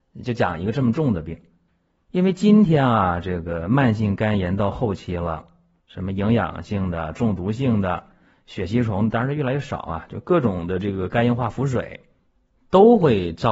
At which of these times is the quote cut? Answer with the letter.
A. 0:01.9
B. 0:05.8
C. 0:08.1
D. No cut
B